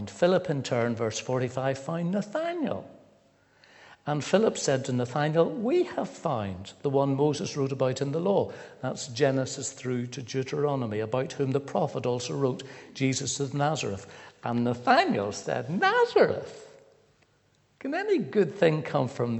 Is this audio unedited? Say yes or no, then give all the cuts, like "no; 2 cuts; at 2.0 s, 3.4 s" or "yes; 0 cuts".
yes; 0 cuts